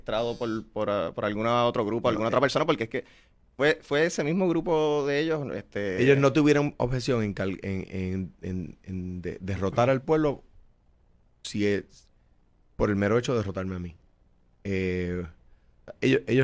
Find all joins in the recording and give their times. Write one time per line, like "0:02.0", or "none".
none